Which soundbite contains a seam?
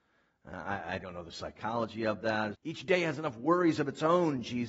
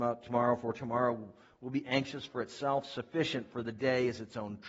first; 1 cut; at 2.5 s

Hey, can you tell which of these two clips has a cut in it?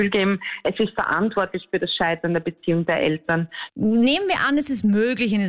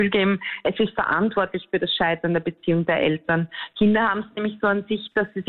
first; 1 cut; at 3.7 s

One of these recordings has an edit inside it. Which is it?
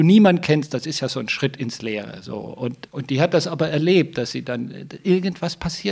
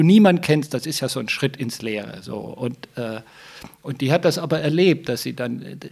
first; 1 cut; at 2.9 s

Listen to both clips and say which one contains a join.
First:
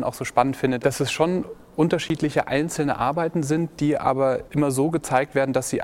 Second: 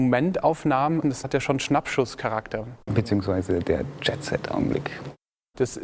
second; 2 cuts; at 1.0 s, 2.9 s

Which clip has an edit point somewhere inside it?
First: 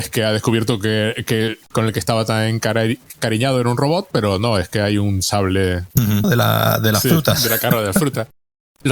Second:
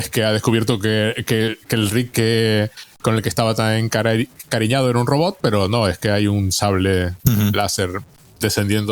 first; 2 cuts; at 1.6 s, 6.2 s

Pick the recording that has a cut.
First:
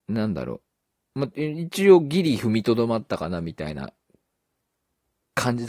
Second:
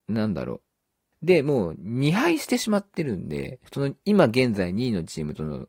second; 2 cuts; at 1.1 s, 3.7 s

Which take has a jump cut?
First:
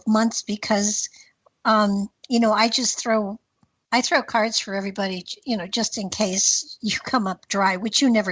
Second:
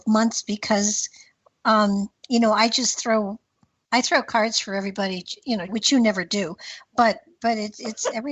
second; 1 cut; at 5.7 s

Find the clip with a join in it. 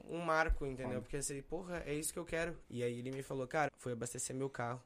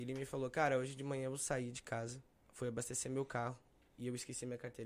first; 2 cuts; at 2.6 s, 3.7 s

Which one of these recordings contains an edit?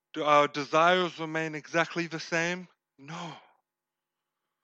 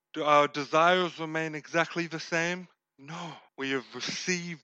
second; 1 cut; at 3.5 s

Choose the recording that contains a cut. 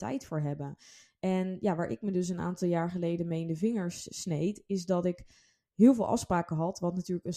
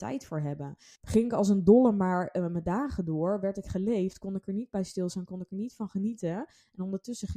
second; 1 cut; at 1.0 s

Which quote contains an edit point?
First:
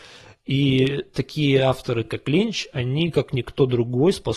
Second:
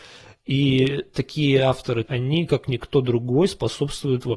second; 1 cut; at 2.1 s

